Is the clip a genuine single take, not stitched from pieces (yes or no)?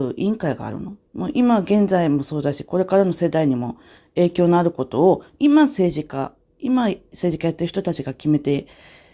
no